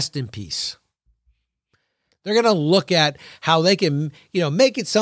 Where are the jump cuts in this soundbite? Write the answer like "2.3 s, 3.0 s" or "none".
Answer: 2.1 s

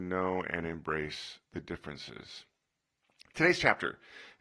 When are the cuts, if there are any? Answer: none

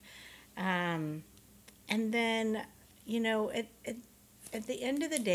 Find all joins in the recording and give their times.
none

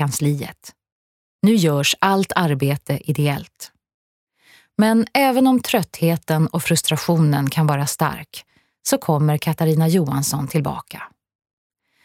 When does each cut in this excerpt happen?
none

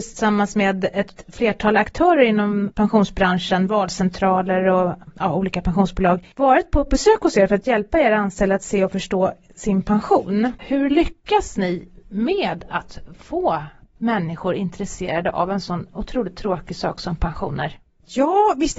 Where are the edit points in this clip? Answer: 10.6 s

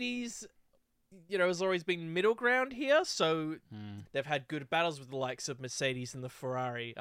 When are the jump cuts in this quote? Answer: 4.1 s

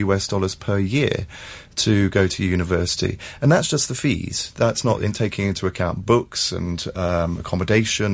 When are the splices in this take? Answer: none

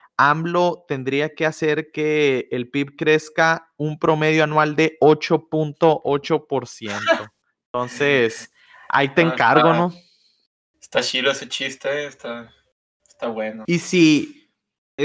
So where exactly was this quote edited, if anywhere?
13.6 s

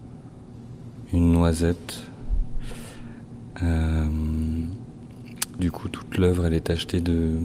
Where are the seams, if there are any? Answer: 5.6 s

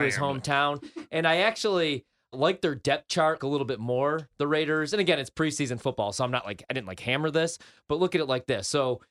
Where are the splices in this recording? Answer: 2.3 s, 3.4 s

